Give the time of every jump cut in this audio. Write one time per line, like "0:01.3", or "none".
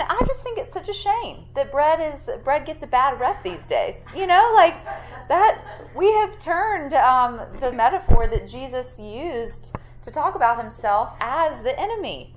0:07.7
0:11.2